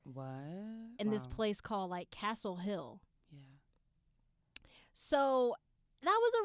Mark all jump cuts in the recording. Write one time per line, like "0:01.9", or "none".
none